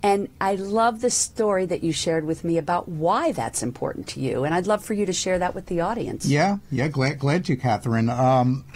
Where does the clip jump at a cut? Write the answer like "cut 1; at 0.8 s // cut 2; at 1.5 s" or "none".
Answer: none